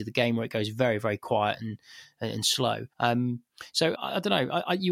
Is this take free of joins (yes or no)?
no